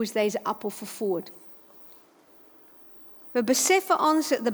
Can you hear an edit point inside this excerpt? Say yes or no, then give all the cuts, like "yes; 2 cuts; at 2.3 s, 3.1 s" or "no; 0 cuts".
yes; 1 cut; at 3.2 s